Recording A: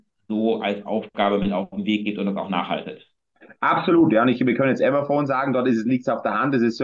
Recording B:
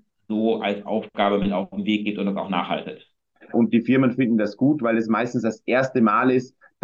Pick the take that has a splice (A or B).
B